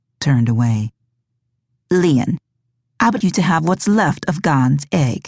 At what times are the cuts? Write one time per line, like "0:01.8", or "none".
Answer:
0:03.2